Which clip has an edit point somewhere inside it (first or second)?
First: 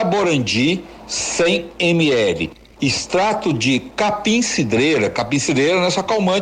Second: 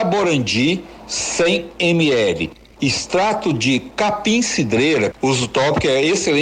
second